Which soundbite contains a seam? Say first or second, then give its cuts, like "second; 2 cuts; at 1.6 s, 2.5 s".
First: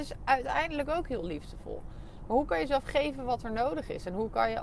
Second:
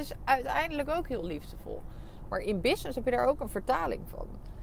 second; 1 cut; at 2.3 s